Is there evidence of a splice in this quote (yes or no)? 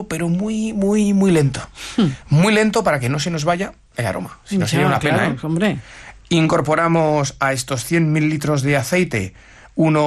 no